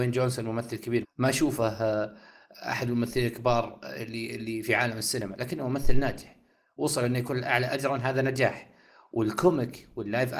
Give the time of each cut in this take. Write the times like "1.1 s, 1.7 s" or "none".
1.0 s, 7.7 s